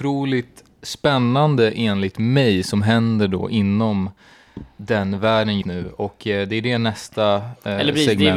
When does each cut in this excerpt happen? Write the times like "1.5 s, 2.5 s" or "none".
5.6 s